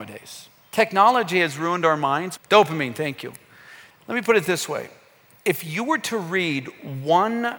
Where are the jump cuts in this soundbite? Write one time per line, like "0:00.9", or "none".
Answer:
0:02.4
0:03.9

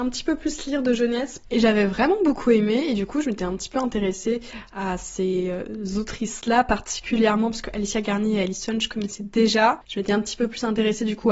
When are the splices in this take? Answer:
0:01.4

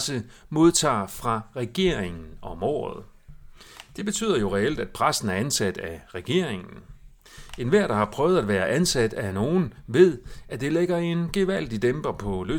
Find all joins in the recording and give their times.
none

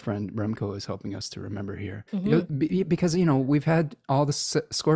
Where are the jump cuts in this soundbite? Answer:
0:02.1

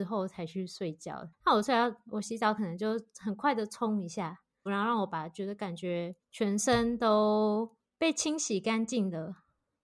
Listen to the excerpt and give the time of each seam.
0:01.3
0:04.7
0:06.2

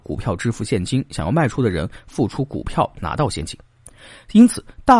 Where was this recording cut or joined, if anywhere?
none

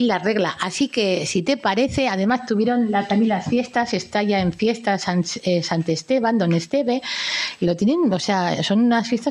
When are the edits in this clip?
none

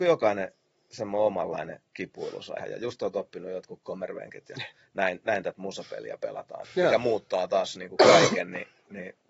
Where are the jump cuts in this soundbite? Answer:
0:02.6
0:06.6

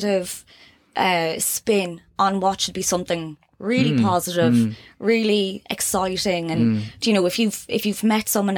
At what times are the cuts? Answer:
none

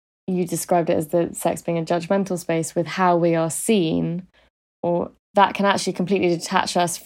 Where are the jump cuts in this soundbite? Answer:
0:05.2

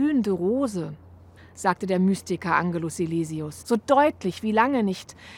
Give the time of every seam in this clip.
0:01.4
0:03.6

